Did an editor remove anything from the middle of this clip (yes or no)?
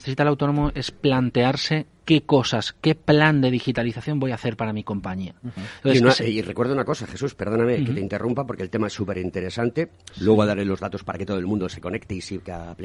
yes